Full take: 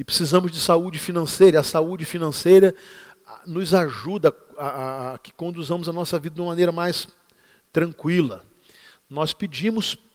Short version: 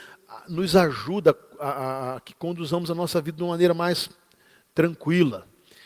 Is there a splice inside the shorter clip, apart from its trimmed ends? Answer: no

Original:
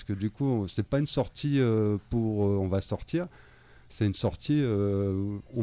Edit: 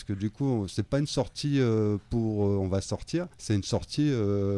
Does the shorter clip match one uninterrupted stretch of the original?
no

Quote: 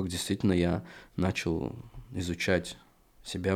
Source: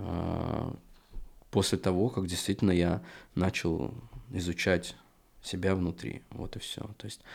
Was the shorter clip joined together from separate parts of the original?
no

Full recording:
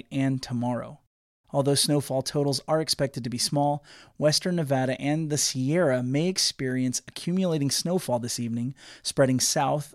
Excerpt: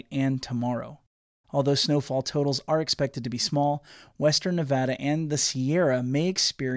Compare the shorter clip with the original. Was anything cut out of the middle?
no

